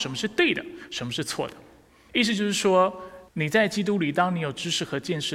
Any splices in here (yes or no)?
yes